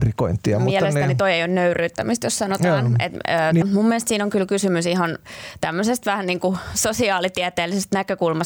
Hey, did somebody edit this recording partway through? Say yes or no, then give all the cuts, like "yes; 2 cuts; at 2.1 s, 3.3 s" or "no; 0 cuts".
yes; 1 cut; at 3.6 s